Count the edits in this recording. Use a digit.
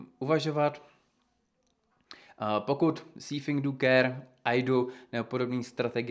0